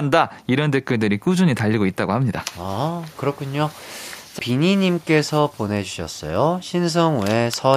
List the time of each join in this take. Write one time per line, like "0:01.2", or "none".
0:04.4

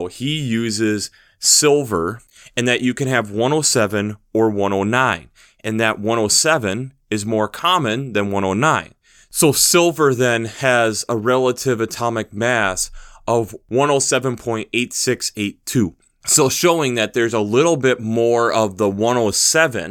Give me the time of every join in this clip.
none

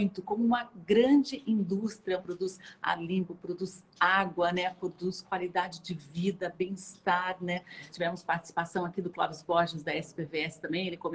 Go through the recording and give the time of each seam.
0:02.2
0:07.9

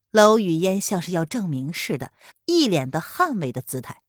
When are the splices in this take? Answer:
0:02.3

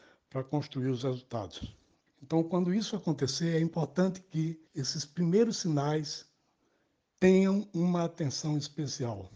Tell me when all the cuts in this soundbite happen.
0:02.1
0:04.7

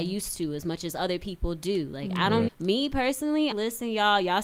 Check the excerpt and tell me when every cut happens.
0:02.5
0:03.5

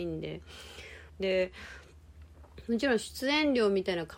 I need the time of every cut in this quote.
0:01.1

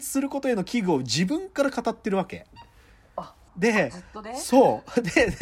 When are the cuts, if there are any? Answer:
0:03.5

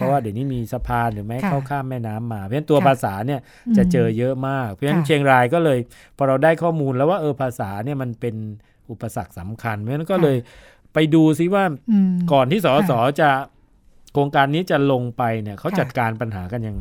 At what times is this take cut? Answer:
none

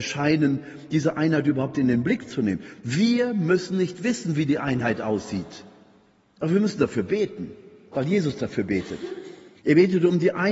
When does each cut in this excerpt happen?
0:09.5

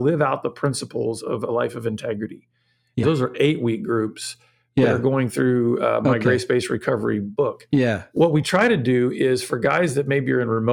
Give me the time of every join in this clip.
0:03.0

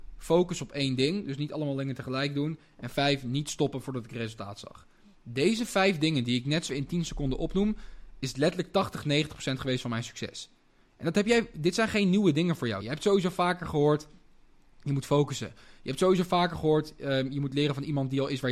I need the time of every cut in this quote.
0:06.7
0:12.8

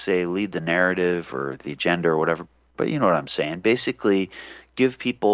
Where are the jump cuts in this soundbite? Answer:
none

